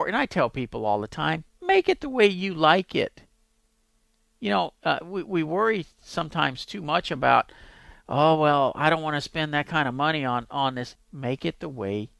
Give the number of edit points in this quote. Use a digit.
1